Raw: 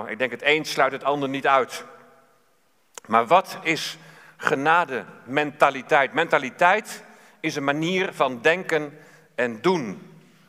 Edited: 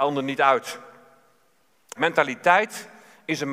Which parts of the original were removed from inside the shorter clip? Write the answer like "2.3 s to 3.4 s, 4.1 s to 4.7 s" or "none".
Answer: 3.0 s to 6.1 s